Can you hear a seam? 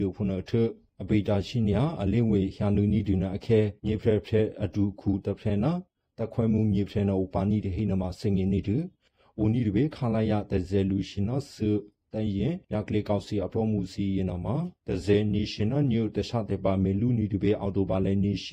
yes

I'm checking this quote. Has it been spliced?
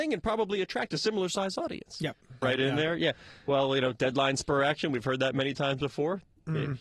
yes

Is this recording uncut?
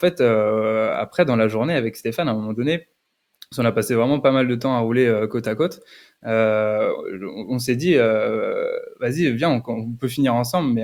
yes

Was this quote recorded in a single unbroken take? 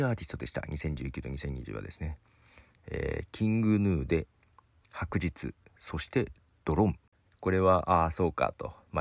no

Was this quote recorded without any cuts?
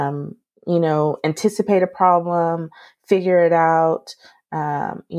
yes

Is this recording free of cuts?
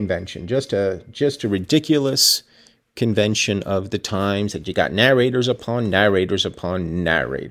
yes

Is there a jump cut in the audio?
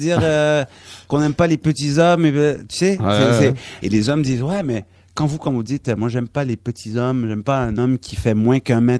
yes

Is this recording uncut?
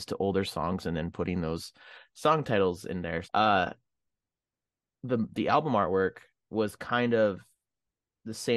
no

